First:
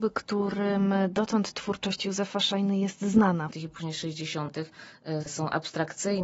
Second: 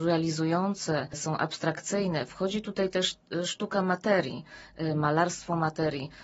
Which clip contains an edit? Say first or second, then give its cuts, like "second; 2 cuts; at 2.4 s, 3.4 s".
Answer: first; 2 cuts; at 3.5 s, 5.2 s